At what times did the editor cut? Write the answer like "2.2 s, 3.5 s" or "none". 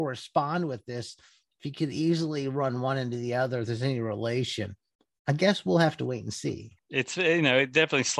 6.8 s